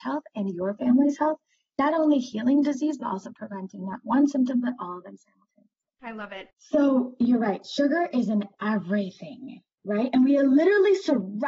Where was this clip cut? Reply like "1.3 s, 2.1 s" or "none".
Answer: 6.5 s